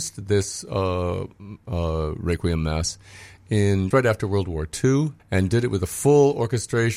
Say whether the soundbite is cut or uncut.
cut